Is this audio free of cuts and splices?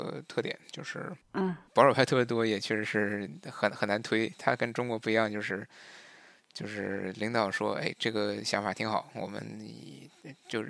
yes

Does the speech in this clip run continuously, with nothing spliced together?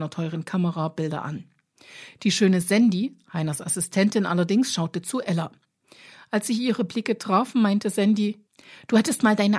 yes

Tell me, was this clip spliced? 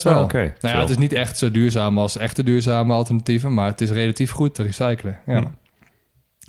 yes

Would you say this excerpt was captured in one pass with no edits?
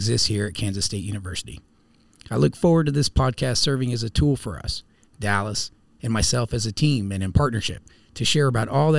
no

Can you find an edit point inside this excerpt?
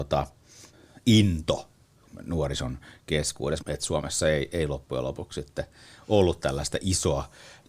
yes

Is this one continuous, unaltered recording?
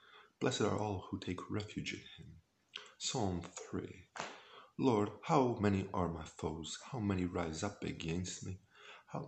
yes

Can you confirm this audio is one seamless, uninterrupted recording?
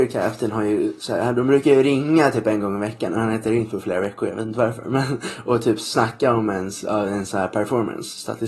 yes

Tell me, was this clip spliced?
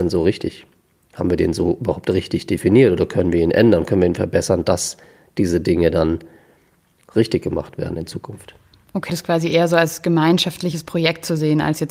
yes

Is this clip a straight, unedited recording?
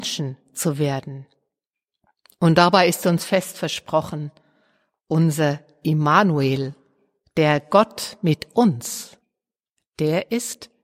yes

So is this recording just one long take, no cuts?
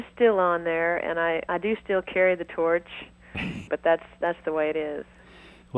no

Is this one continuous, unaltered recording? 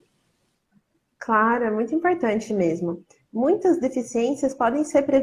yes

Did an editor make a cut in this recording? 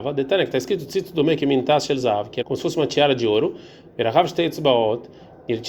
yes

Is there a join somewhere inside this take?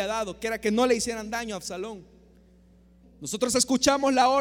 yes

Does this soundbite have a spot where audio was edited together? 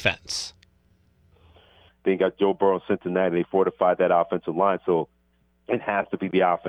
yes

